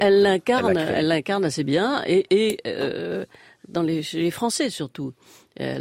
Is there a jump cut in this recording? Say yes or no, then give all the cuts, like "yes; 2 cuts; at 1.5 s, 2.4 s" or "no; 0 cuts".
no; 0 cuts